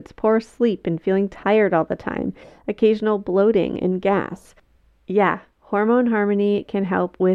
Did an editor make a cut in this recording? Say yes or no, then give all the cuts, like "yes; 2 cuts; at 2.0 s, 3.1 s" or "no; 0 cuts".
no; 0 cuts